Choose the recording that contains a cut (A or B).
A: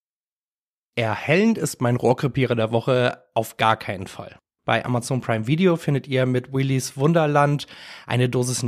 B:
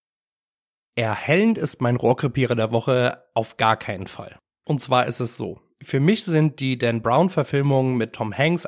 A